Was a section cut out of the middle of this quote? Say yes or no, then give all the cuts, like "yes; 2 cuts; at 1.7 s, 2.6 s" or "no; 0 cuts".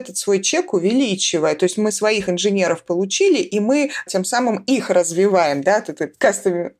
no; 0 cuts